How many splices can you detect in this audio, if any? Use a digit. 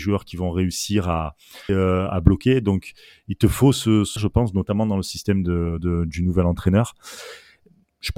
2